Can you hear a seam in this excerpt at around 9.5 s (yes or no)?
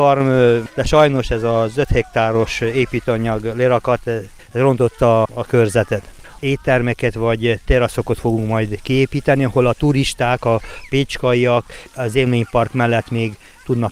no